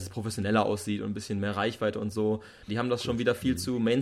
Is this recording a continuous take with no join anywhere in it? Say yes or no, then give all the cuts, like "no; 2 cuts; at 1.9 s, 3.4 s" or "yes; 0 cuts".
no; 1 cut; at 2.7 s